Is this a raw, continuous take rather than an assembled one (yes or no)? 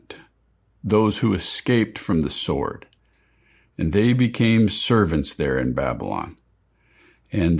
yes